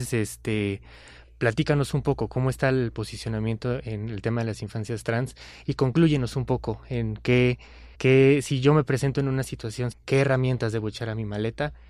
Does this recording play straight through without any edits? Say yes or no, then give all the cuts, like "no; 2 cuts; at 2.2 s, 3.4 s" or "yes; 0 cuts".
no; 2 cuts; at 7.9 s, 9.9 s